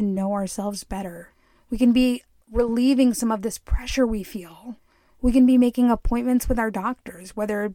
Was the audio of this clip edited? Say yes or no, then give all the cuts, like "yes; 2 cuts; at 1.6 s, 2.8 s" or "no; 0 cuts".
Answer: no; 0 cuts